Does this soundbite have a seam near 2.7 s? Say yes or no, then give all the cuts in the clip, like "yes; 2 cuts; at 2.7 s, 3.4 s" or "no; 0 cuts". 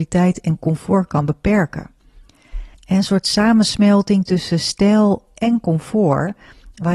yes; 1 cut; at 2.7 s